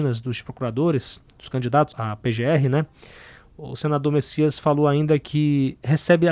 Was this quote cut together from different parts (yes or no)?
yes